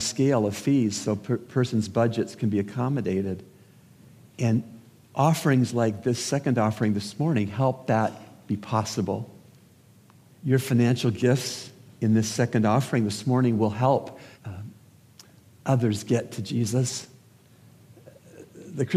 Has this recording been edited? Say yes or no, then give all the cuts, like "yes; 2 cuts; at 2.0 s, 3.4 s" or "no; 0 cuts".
yes; 2 cuts; at 10.4 s, 14.3 s